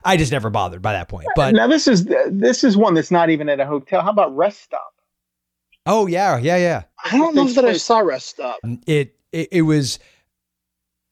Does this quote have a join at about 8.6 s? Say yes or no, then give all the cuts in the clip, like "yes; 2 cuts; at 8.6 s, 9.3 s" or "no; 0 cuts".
yes; 2 cuts; at 6.9 s, 8.6 s